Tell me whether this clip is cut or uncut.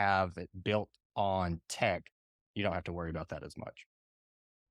uncut